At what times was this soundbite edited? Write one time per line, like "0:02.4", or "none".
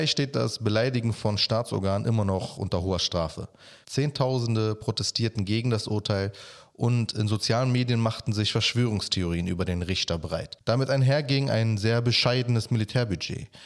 0:03.8
0:10.6